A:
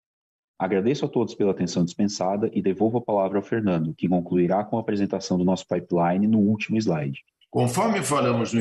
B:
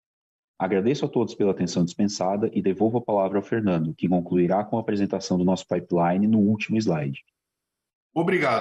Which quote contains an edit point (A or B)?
A